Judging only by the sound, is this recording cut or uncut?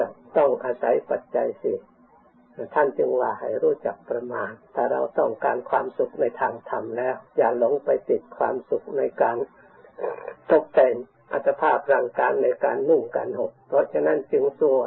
cut